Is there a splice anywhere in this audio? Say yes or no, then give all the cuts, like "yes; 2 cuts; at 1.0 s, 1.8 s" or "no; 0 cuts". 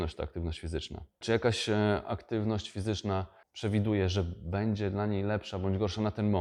no; 0 cuts